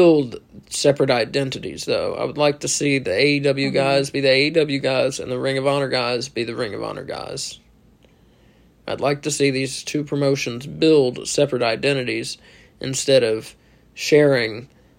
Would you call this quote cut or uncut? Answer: uncut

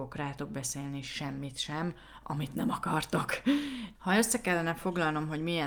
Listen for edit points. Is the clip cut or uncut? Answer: cut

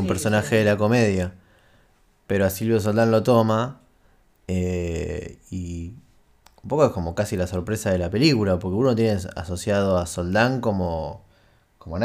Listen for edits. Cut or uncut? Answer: uncut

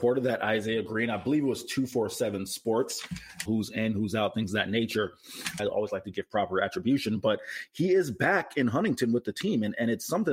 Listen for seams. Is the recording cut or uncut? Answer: cut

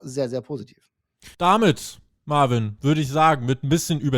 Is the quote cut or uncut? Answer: cut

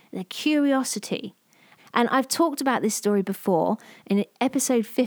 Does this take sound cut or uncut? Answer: cut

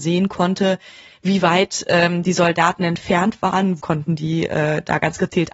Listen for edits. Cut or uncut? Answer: cut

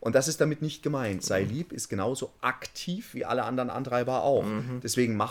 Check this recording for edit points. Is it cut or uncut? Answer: uncut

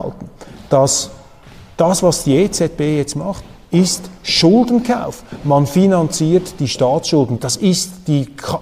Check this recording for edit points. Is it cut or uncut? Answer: cut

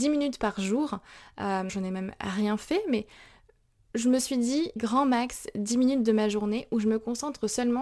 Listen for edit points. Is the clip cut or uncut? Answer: cut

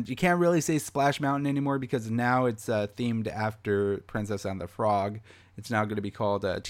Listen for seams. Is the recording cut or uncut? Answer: uncut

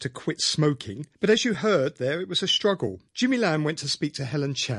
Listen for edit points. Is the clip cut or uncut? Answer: cut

